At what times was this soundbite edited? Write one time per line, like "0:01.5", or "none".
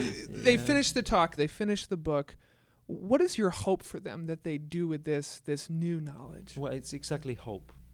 0:01.4